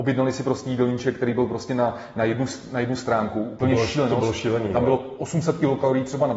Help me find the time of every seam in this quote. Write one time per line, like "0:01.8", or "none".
none